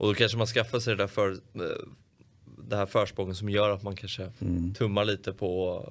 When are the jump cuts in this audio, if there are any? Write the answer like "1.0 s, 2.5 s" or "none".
4.4 s